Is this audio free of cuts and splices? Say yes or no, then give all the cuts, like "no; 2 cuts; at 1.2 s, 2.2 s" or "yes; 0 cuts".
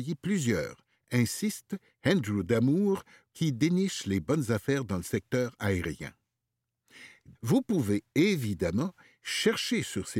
no; 2 cuts; at 3.3 s, 7.3 s